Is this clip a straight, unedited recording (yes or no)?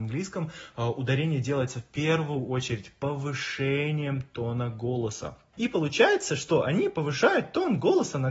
no